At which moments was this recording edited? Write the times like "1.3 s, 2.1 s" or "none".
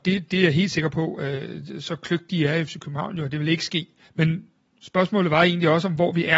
4.1 s